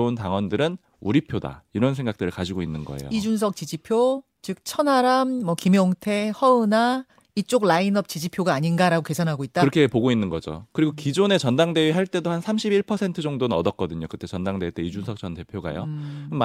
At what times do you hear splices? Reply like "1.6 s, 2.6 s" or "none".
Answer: none